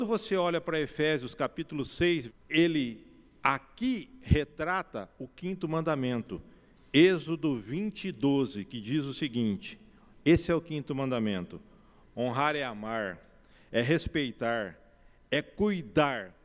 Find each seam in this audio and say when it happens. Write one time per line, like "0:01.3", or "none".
0:02.3
0:12.0